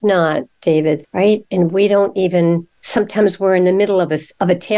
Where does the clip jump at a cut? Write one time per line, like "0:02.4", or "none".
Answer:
0:01.0